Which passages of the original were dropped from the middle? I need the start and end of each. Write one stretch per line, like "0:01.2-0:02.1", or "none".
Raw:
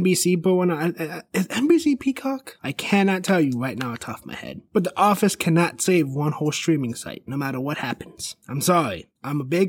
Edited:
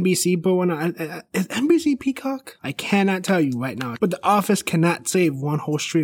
0:04.0-0:04.7